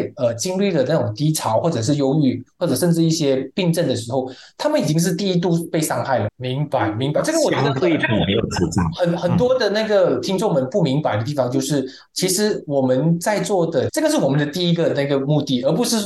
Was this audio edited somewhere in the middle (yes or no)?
yes